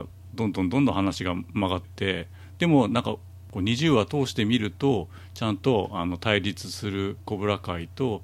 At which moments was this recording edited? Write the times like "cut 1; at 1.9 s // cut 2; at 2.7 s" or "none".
cut 1; at 1.8 s

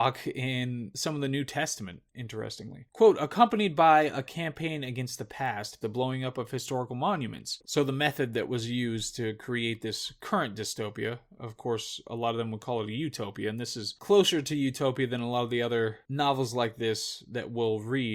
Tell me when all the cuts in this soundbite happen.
cut 1; at 5.8 s // cut 2; at 7.6 s

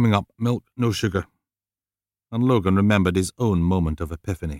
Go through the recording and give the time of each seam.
none

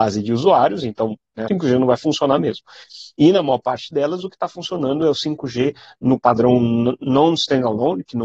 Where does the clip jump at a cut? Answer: cut 1; at 1.5 s

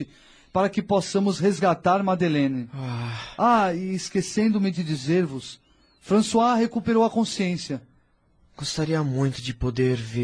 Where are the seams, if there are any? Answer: none

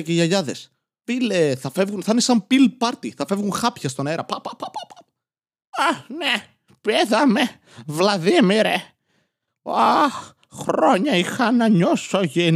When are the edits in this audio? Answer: none

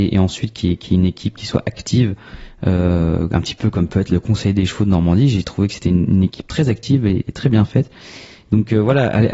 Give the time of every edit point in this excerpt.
none

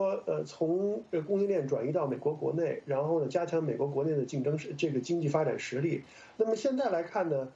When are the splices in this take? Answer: cut 1; at 6.4 s

